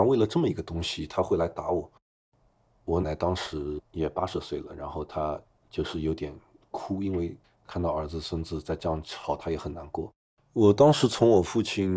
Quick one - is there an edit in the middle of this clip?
yes; 2 cuts; at 3.0 s, 10.3 s

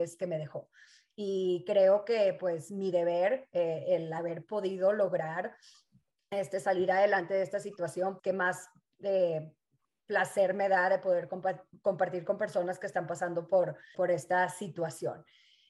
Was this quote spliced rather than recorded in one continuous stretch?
yes; 2 cuts; at 8.2 s, 13.9 s

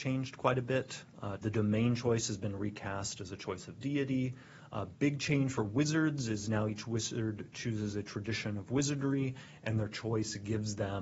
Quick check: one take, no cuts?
no; 1 cut; at 1.4 s

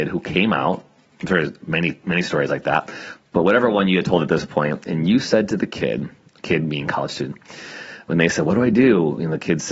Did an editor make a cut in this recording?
no; 0 cuts

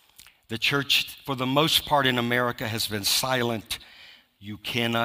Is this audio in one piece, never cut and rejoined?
yes; 0 cuts

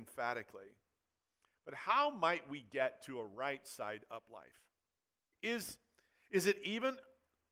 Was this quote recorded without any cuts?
no; 1 cut; at 5.3 s

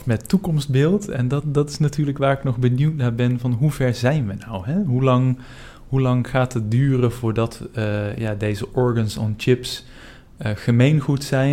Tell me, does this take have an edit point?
no; 0 cuts

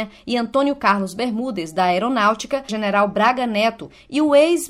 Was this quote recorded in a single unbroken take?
no; 1 cut; at 2.7 s

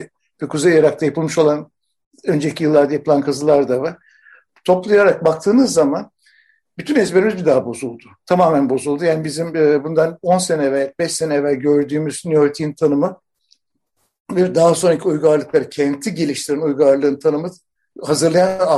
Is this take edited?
no; 0 cuts

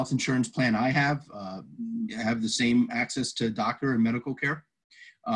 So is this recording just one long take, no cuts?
no; 1 cut; at 2.1 s

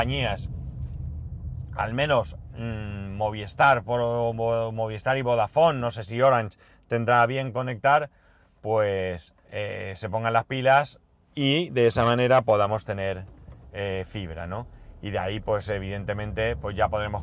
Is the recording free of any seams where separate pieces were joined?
no; 1 cut; at 9.4 s

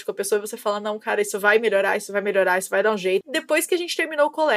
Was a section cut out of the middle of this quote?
yes; 1 cut; at 3.2 s

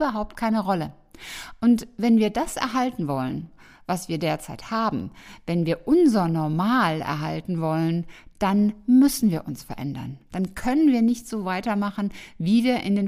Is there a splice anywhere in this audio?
no; 0 cuts

